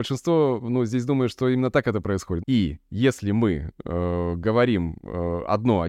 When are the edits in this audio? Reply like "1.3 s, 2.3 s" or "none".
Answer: 2.4 s